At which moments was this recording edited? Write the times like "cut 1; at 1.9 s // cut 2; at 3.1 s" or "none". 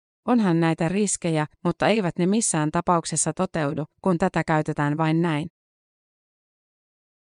cut 1; at 1.5 s // cut 2; at 3.9 s